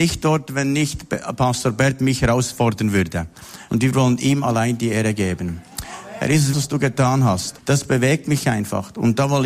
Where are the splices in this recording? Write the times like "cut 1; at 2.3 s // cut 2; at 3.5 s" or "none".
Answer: cut 1; at 3.7 s // cut 2; at 6.5 s // cut 3; at 7.6 s